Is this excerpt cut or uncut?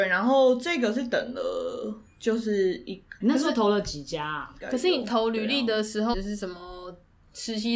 cut